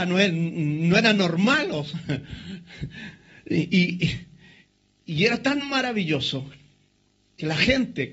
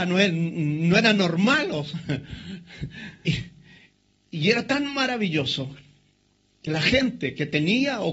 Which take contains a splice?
second; 1 cut; at 3.2 s

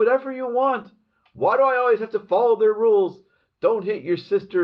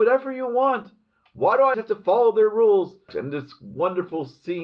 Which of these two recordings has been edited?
second; 2 cuts; at 1.7 s, 3.1 s

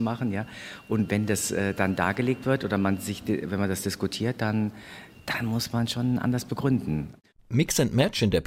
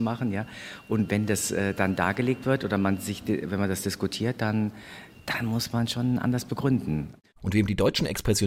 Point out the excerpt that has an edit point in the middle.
second; 1 cut; at 7.4 s

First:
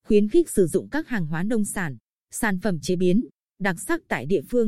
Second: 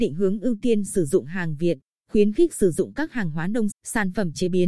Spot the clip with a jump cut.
second; 1 cut; at 3.7 s

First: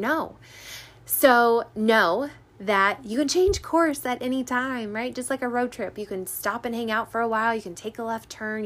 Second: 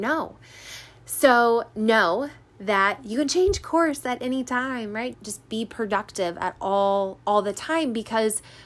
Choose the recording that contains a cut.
second; 1 cut; at 5.1 s

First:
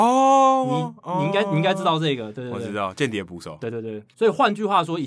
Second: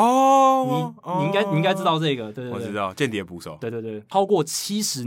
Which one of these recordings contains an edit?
second; 1 cut; at 4.1 s

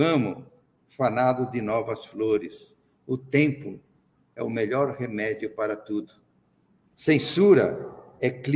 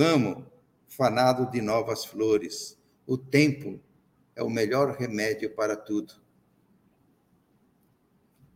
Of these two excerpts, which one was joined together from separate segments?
first; 1 cut; at 6.9 s

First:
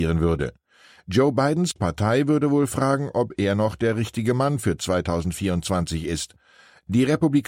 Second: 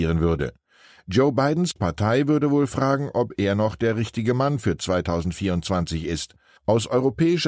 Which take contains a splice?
second; 1 cut; at 6.6 s

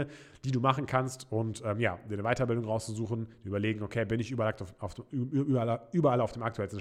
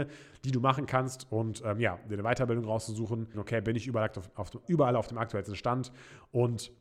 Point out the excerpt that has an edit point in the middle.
second; 2 cuts; at 3.3 s, 4.6 s

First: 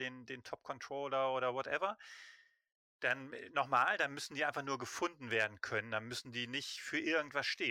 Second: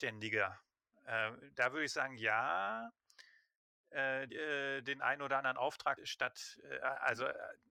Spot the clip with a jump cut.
second; 2 cuts; at 4.3 s, 6.0 s

